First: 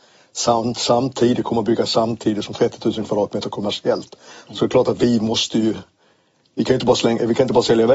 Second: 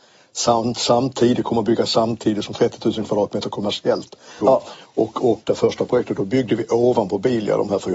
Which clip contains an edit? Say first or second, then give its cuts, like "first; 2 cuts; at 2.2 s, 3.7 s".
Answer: second; 2 cuts; at 4.4 s, 5.4 s